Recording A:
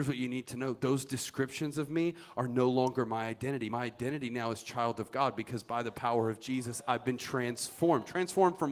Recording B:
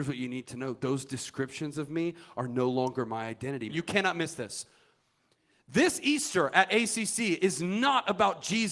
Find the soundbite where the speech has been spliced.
B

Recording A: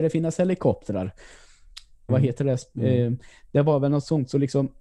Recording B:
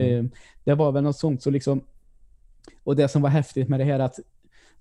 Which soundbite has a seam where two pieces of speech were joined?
A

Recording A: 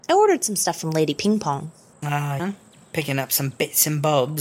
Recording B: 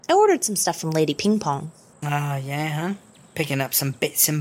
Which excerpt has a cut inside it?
A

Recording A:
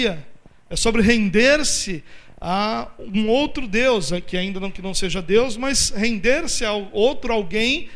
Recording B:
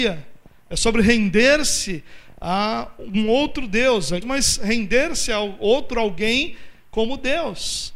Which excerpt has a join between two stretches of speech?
B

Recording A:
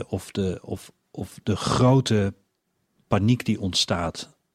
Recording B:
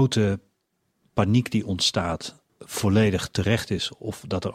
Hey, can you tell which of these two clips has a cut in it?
B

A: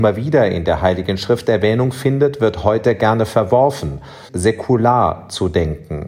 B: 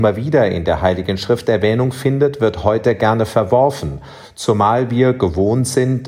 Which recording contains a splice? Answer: A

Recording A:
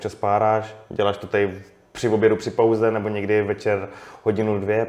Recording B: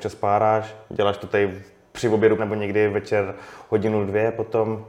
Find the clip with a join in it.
B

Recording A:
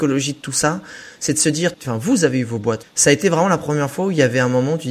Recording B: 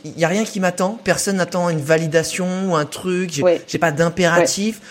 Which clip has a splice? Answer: A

